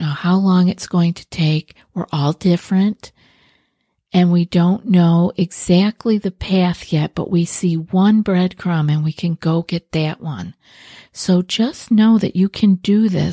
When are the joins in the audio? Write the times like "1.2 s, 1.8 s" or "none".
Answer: none